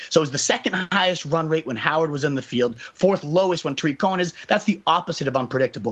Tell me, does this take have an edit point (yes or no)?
no